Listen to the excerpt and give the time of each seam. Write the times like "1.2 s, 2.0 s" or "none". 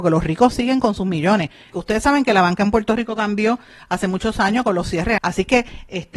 1.7 s, 5.2 s